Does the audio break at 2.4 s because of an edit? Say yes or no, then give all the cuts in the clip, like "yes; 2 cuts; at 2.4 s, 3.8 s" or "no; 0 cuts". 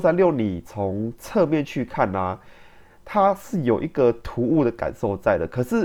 no; 0 cuts